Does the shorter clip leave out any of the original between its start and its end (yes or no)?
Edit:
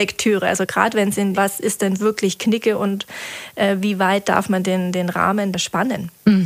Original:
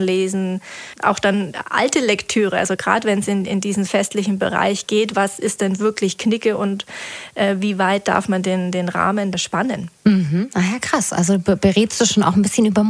yes